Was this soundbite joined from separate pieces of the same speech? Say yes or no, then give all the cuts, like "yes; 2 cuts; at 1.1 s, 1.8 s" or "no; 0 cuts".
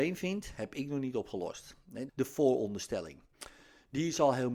yes; 1 cut; at 2.1 s